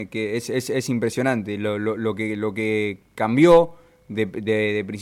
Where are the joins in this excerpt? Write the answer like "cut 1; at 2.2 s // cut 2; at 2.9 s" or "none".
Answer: none